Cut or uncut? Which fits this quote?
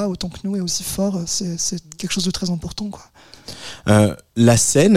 uncut